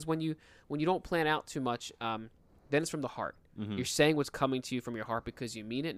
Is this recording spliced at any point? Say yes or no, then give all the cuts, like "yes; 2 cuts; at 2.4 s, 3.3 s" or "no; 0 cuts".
no; 0 cuts